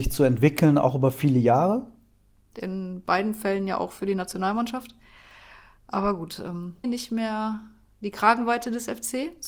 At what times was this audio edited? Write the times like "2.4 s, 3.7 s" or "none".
2.4 s, 6.8 s